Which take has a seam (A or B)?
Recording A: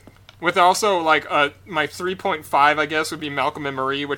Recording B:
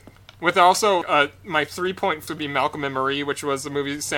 B